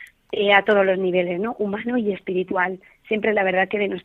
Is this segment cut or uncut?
uncut